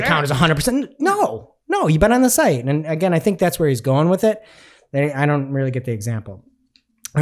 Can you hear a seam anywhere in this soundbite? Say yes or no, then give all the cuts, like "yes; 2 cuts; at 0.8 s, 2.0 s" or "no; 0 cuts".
no; 0 cuts